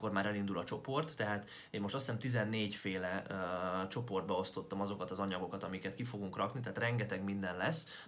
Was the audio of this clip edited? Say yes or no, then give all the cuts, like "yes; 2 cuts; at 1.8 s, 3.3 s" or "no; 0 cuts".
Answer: no; 0 cuts